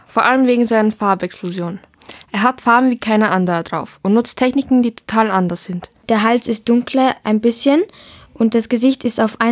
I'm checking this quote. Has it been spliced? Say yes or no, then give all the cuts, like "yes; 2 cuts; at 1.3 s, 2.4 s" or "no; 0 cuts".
yes; 1 cut; at 6.0 s